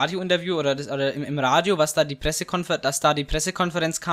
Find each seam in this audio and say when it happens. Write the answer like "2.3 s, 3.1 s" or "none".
none